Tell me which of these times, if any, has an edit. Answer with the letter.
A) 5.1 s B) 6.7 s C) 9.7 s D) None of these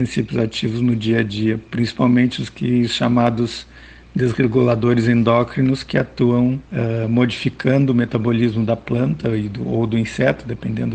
B